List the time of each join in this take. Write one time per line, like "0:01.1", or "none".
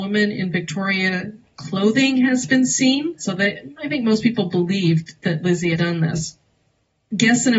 0:03.2
0:05.7

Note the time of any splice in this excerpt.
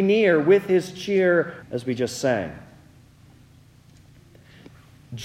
0:01.6

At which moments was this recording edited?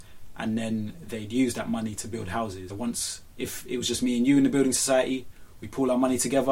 0:02.7

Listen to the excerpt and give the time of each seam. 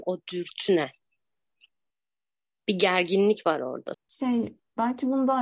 0:03.9

